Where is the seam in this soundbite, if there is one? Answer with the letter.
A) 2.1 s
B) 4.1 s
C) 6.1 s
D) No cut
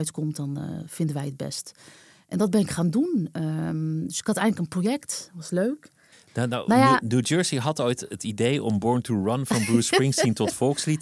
C